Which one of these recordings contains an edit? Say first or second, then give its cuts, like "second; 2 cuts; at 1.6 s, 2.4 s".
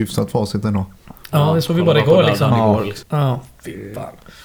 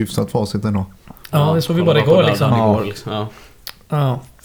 first; 1 cut; at 3.0 s